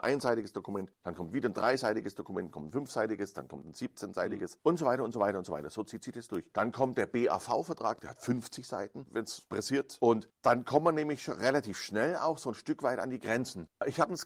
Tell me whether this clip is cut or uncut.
uncut